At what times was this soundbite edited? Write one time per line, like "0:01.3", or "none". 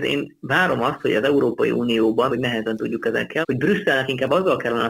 0:02.3
0:03.4